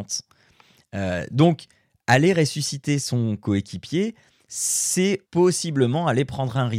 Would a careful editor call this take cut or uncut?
cut